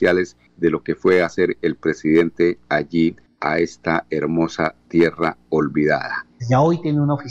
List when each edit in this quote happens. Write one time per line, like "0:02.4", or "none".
0:06.4